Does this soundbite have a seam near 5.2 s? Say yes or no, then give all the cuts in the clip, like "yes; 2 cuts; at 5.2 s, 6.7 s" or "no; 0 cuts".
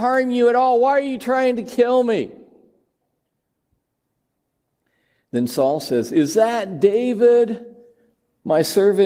no; 0 cuts